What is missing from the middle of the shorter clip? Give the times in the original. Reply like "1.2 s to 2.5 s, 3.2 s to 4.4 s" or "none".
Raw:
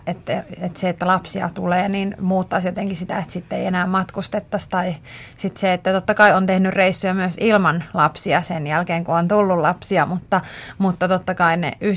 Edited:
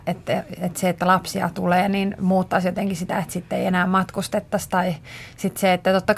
none